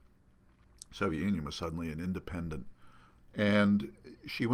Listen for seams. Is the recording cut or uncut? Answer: cut